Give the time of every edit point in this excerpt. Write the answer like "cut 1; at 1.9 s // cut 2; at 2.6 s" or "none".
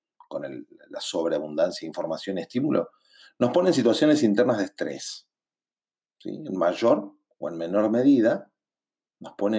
none